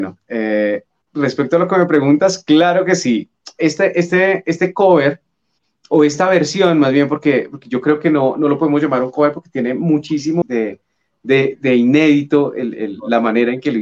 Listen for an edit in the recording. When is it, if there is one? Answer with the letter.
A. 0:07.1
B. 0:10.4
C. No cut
B